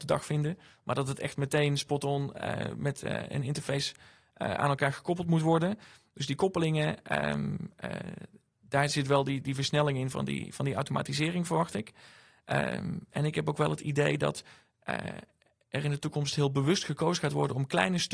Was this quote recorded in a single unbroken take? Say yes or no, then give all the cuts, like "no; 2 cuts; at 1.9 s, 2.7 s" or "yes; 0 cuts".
yes; 0 cuts